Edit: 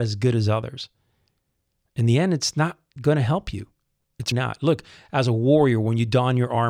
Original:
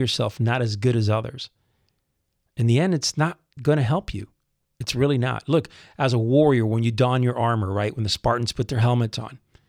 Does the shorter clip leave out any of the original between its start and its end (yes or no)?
yes